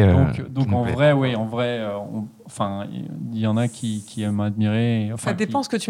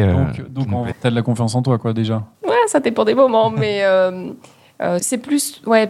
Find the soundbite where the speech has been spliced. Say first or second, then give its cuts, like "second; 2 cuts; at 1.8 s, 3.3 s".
second; 3 cuts; at 0.9 s, 2.3 s, 5.0 s